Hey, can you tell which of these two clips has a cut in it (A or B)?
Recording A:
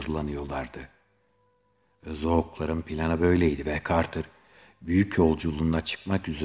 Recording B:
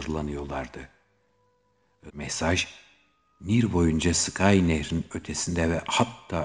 B